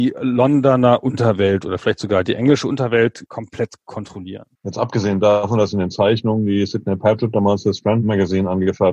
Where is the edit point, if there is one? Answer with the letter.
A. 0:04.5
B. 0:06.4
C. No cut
A